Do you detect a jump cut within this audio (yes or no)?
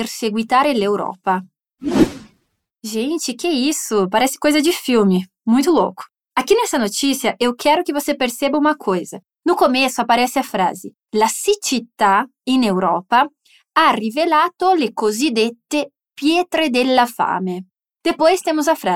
no